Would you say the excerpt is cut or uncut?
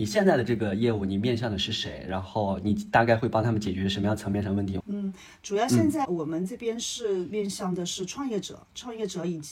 cut